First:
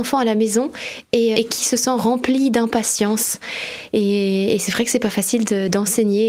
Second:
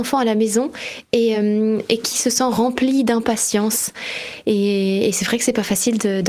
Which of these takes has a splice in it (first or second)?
first